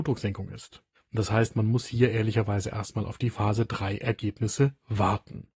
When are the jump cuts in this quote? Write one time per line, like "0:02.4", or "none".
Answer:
0:00.9

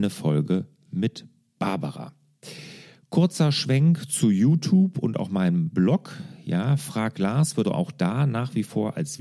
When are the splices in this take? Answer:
0:07.6

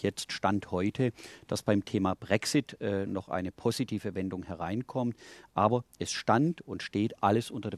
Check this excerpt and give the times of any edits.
none

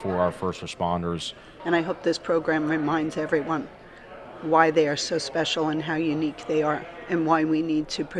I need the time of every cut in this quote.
0:01.6

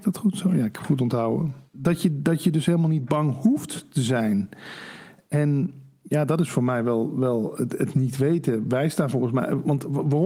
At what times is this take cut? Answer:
0:01.7

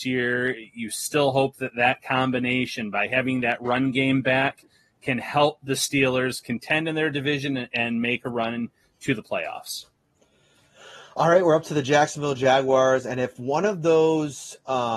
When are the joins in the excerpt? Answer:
none

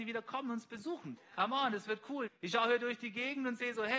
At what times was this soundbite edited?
0:01.2
0:02.3

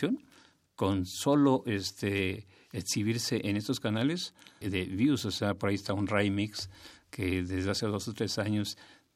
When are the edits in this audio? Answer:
0:04.6

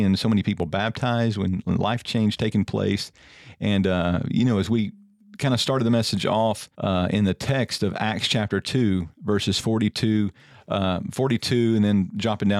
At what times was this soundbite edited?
0:06.7

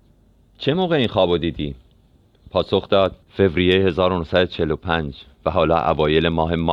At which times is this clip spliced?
0:03.2

